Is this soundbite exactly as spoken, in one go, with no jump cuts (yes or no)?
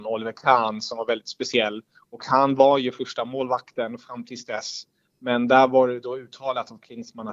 yes